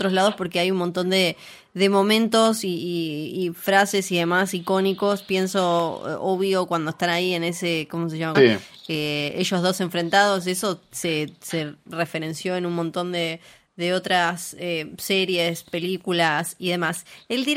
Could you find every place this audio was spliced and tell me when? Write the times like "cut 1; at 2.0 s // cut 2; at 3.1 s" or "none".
cut 1; at 8.3 s